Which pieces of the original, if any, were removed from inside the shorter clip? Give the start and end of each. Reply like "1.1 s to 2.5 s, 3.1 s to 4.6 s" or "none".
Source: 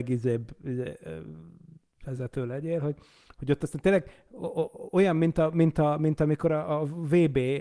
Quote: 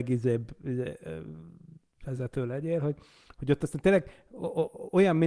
none